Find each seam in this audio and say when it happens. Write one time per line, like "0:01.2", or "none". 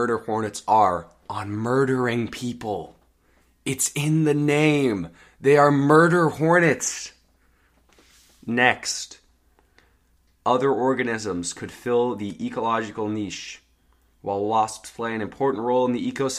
none